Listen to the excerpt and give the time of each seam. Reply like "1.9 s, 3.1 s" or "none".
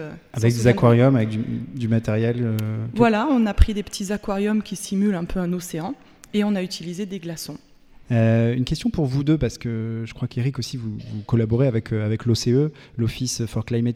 none